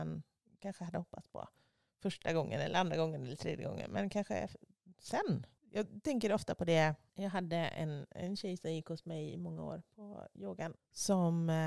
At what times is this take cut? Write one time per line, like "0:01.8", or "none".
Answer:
0:10.7